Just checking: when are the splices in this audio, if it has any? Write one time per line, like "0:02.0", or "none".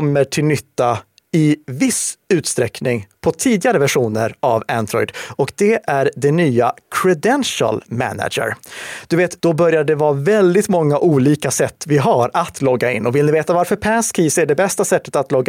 0:09.4